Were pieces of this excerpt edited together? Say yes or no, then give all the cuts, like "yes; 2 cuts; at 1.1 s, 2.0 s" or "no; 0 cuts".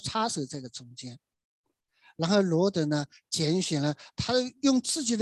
no; 0 cuts